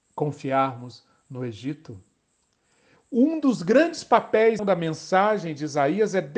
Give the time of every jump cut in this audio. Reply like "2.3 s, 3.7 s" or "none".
4.6 s